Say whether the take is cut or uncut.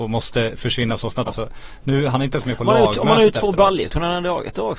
cut